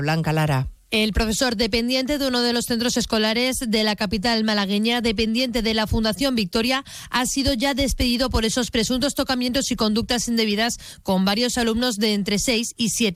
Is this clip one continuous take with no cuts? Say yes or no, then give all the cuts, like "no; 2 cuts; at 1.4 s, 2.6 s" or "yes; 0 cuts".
yes; 0 cuts